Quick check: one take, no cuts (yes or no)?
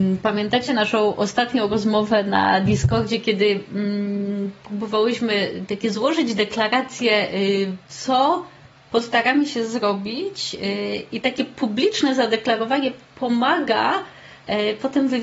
no